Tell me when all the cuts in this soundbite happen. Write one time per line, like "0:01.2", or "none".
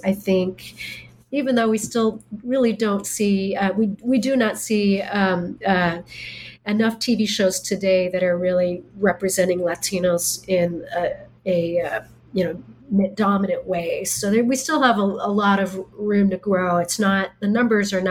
none